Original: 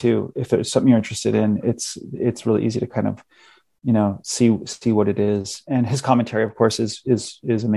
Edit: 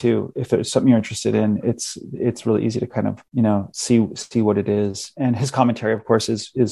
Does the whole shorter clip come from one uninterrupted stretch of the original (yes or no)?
no